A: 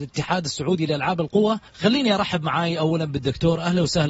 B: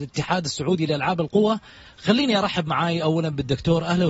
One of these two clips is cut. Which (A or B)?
A